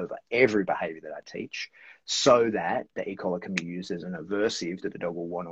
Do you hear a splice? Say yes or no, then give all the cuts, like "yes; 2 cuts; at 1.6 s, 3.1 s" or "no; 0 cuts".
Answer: no; 0 cuts